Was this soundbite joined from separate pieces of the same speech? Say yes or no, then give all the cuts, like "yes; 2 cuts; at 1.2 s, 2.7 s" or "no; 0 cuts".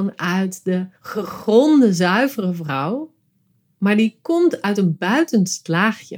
yes; 1 cut; at 1.0 s